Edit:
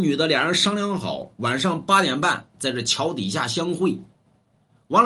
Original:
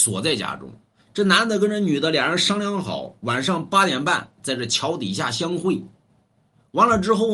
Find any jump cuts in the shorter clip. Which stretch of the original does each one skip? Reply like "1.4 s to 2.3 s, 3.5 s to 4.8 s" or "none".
none